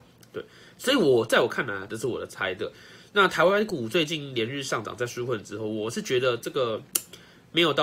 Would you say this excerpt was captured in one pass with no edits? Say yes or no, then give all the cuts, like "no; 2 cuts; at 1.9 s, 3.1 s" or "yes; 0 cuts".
no; 1 cut; at 1.9 s